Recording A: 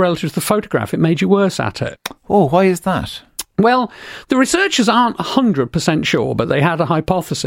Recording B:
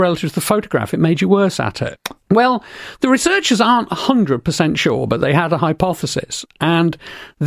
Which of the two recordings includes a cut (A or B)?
B